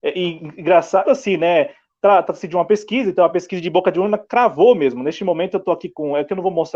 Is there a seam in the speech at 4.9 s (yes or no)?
no